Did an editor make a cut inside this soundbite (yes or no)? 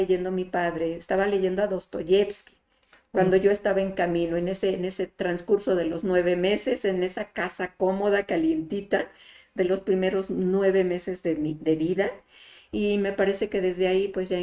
yes